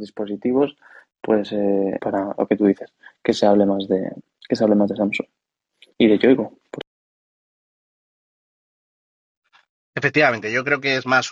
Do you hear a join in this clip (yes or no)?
yes